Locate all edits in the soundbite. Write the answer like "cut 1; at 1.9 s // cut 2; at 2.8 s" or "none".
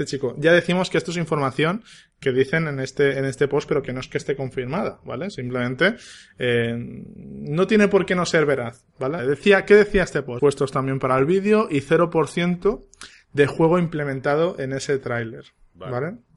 cut 1; at 9.2 s // cut 2; at 10.4 s